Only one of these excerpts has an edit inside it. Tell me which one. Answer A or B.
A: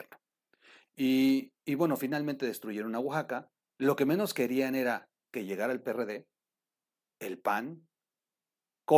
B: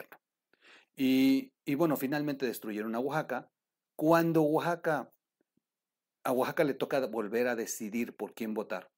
A